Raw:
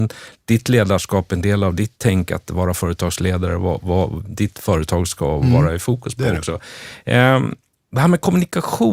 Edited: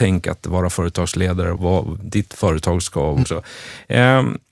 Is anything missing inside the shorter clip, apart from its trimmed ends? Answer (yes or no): yes